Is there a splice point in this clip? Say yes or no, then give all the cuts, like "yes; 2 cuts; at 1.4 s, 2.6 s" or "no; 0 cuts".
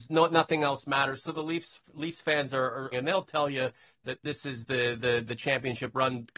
yes; 1 cut; at 2.9 s